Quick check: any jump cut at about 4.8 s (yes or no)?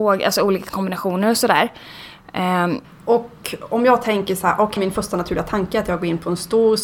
yes